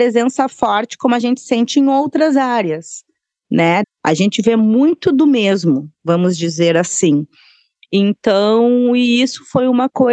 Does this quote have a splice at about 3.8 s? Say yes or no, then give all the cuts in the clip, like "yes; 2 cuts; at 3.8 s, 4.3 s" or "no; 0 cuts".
yes; 1 cut; at 3.8 s